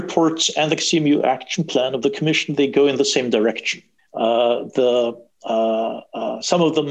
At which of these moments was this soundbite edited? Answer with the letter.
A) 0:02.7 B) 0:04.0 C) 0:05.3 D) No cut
B